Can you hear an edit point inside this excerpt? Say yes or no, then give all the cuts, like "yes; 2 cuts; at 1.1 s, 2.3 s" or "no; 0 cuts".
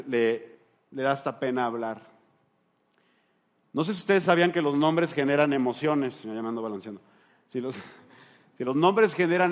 no; 0 cuts